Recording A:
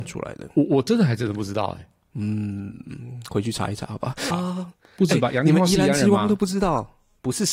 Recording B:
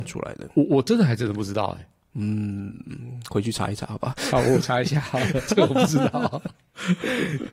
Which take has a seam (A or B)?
A